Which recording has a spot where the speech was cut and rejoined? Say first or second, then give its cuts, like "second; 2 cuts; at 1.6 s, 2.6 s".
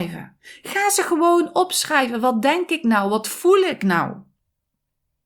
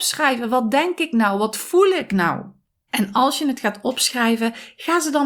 second; 1 cut; at 2.9 s